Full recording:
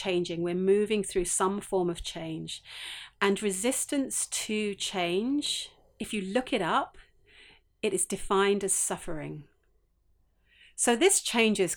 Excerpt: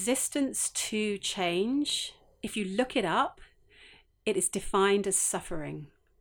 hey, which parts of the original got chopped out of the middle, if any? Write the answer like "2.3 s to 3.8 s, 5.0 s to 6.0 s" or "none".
none